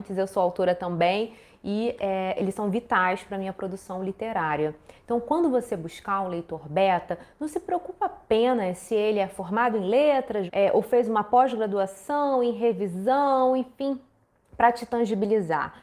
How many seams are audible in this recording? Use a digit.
2